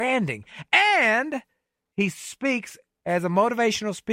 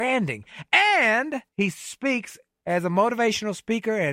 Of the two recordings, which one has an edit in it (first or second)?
second